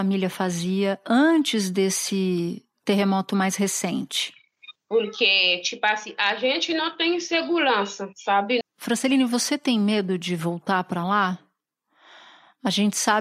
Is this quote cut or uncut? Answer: cut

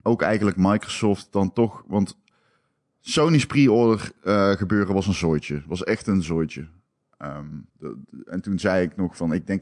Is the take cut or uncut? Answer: cut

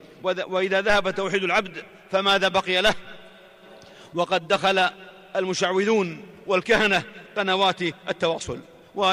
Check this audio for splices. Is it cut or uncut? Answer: uncut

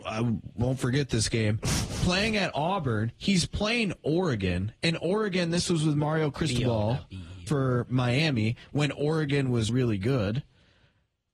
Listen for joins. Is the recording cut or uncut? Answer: cut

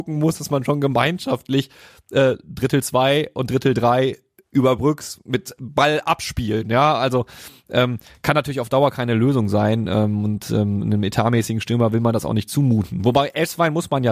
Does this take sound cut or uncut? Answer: uncut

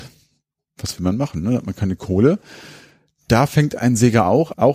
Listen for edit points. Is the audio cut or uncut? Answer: uncut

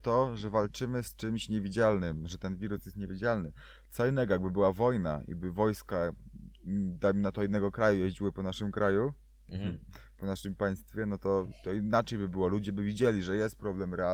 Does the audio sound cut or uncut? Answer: uncut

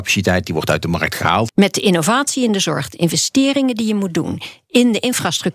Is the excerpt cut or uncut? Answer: cut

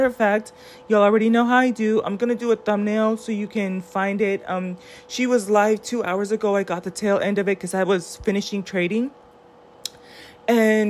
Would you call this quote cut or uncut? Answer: uncut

